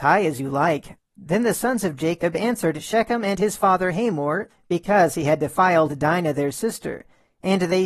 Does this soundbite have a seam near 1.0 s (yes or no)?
yes